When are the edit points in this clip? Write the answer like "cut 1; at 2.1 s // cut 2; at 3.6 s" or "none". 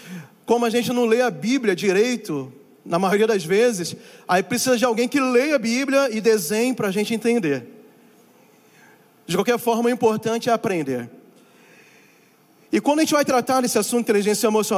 none